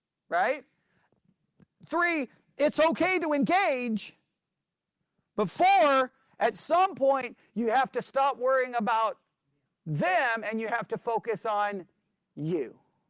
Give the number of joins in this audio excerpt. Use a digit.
0